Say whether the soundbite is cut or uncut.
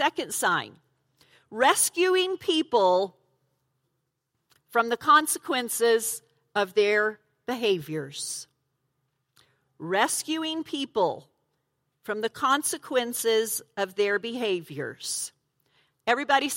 uncut